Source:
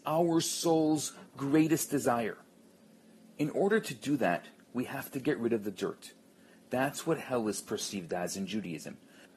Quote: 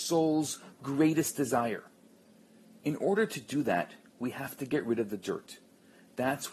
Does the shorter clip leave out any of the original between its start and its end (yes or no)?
no